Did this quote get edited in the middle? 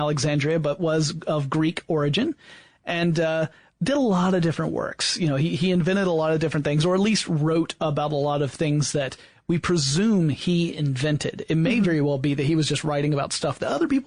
no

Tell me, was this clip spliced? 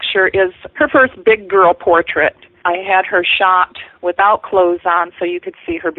no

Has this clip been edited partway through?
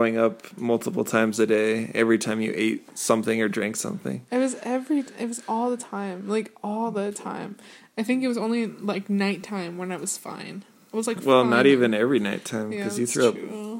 no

